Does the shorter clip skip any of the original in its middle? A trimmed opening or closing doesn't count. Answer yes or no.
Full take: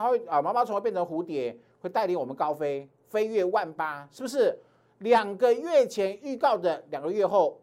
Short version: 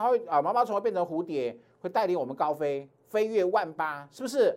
no